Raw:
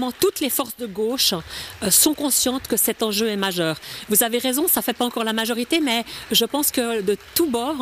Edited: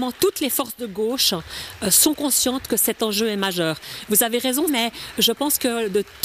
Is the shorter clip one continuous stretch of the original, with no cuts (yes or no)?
no